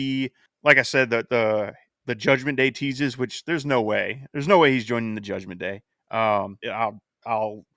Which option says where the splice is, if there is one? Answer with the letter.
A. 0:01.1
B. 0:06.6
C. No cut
B